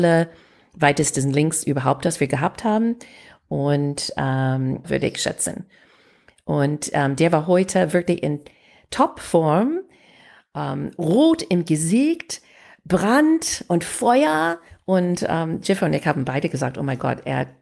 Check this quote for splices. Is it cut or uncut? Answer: cut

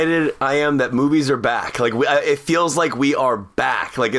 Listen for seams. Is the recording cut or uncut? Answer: uncut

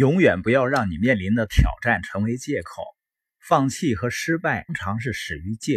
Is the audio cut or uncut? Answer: cut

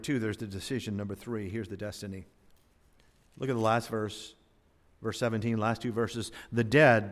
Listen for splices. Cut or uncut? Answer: uncut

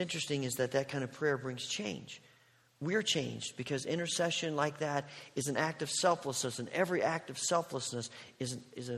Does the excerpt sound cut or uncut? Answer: uncut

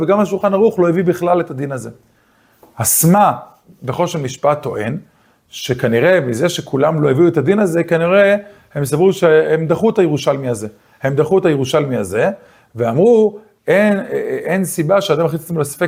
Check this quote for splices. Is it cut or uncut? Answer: uncut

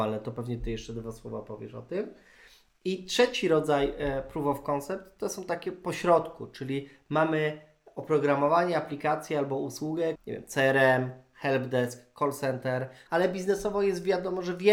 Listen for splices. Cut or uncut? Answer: cut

